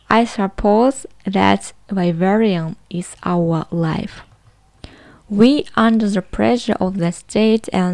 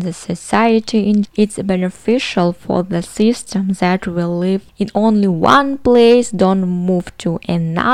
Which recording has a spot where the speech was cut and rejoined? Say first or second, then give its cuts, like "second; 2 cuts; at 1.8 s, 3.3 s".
second; 2 cuts; at 1.3 s, 4.7 s